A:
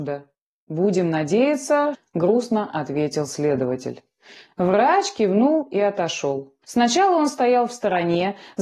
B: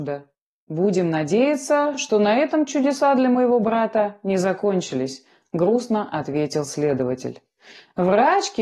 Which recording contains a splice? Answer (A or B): A